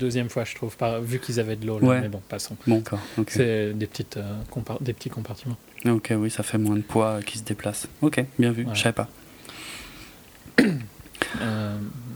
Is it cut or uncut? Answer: cut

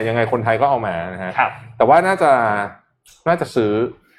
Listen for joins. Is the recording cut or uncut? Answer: uncut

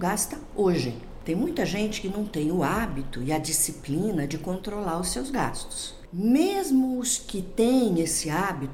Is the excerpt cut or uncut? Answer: uncut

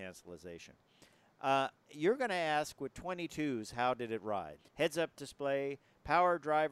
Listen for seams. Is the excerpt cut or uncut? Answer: cut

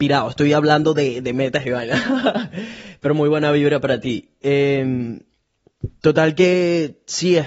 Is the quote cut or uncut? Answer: uncut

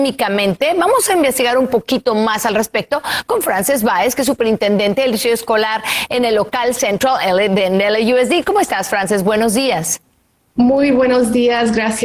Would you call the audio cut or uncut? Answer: uncut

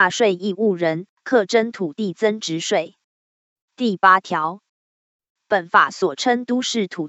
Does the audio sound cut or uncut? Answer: cut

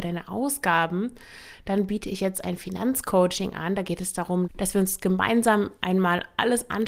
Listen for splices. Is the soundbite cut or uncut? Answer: uncut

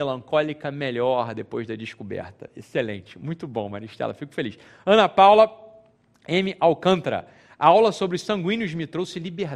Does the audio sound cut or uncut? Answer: uncut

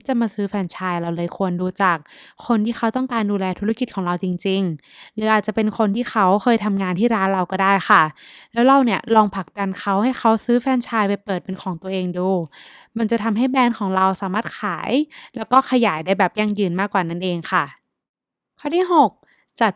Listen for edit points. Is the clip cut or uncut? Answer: uncut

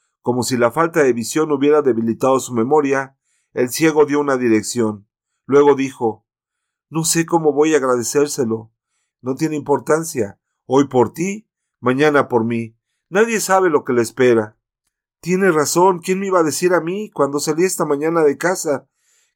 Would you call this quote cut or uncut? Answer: cut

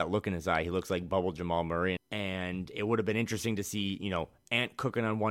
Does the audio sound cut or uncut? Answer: cut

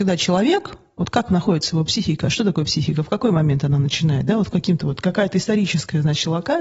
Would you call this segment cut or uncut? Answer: uncut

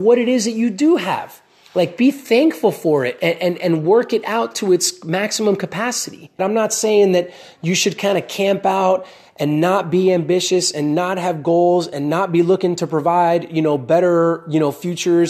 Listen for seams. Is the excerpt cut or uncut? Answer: cut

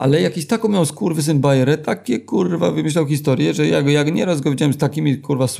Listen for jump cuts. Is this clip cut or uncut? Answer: uncut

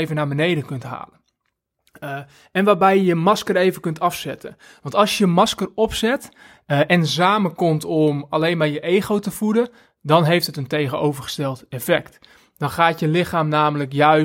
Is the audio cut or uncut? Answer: uncut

